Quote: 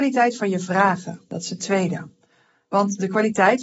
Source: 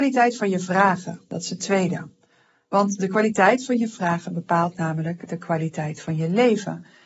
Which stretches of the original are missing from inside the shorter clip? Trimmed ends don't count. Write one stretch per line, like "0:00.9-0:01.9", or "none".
none